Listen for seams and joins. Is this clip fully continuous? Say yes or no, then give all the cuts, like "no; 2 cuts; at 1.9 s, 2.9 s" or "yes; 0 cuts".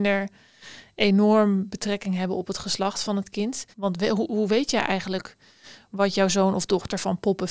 no; 1 cut; at 3.7 s